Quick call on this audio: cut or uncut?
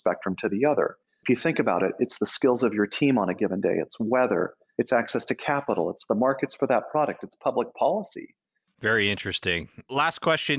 cut